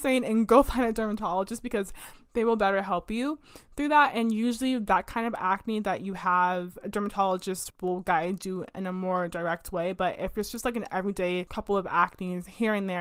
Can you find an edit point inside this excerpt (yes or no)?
yes